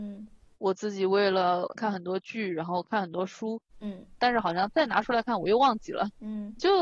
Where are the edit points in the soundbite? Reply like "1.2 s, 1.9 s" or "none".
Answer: 1.8 s, 4.2 s